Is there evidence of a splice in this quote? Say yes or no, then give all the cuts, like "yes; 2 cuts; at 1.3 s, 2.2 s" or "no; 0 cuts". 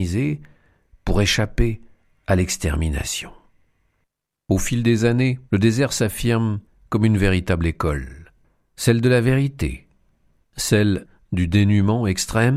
yes; 2 cuts; at 5.4 s, 10.4 s